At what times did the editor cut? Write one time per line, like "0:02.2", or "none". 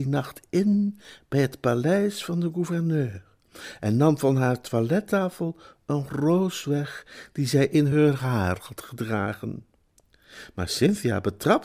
none